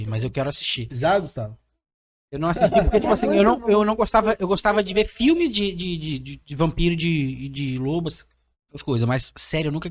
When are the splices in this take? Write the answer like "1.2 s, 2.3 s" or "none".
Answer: none